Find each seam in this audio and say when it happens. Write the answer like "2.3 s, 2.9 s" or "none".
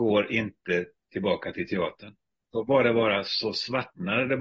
2.5 s